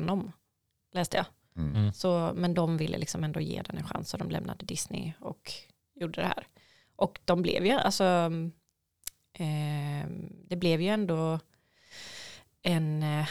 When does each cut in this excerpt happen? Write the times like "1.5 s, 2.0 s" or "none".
none